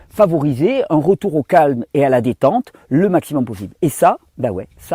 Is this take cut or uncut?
uncut